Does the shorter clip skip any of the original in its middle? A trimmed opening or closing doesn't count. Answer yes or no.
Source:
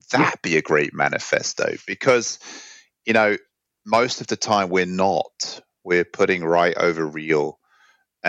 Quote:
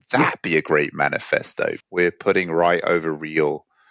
yes